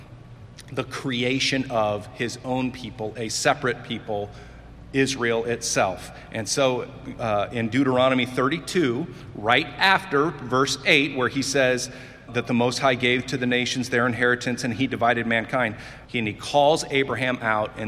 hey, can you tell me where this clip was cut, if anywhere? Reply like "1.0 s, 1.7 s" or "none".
12.3 s, 16.0 s